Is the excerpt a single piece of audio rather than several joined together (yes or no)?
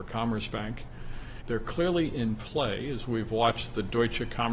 no